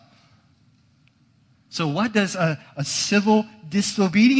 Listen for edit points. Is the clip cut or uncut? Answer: uncut